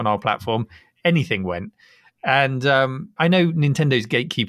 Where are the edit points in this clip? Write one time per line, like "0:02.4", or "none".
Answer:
0:03.2